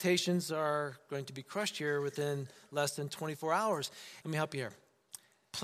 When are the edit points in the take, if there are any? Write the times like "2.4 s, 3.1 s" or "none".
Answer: 4.2 s